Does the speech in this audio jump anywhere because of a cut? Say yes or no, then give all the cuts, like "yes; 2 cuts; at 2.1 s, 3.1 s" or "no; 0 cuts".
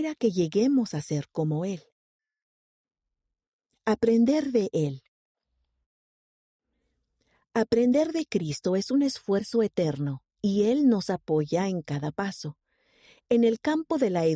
no; 0 cuts